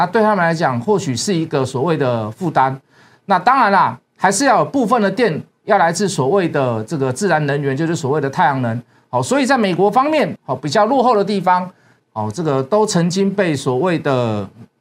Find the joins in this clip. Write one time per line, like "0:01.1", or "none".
0:10.4
0:12.0